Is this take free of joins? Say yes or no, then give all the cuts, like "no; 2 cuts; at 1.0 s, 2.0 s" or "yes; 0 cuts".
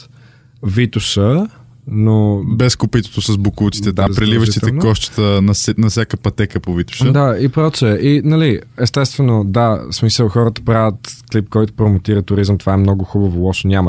no; 1 cut; at 4.1 s